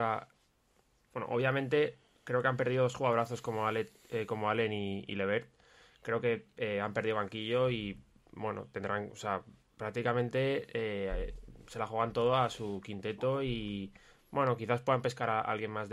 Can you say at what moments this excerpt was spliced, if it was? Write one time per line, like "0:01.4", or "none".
none